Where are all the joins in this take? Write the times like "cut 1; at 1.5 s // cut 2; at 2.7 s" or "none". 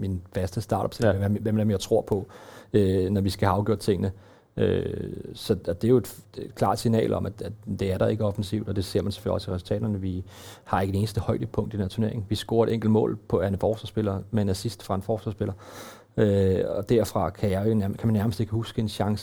none